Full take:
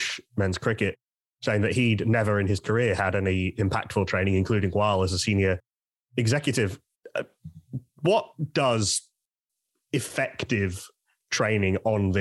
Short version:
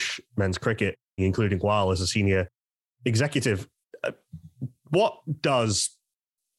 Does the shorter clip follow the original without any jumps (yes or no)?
no